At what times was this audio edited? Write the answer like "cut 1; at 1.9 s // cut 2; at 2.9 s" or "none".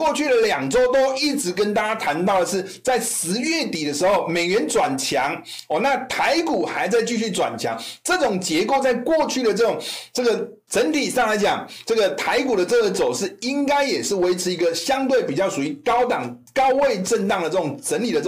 cut 1; at 10.7 s